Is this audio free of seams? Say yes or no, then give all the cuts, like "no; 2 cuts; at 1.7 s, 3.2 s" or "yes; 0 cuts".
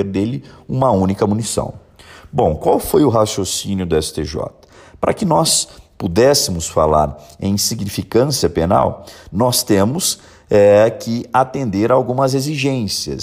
yes; 0 cuts